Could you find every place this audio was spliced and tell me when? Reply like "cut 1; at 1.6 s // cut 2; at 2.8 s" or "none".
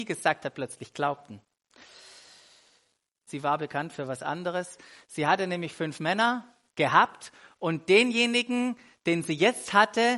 cut 1; at 3.3 s